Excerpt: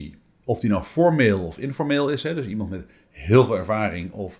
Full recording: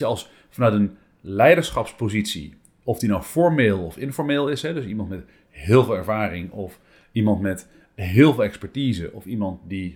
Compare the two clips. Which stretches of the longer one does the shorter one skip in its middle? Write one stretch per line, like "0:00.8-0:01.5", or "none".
none